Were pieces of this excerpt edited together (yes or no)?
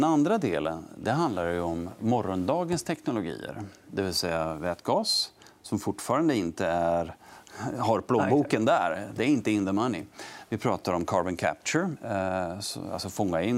no